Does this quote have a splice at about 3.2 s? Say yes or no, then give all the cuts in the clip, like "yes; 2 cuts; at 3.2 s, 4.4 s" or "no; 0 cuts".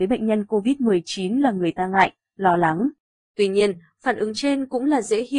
yes; 1 cut; at 3.2 s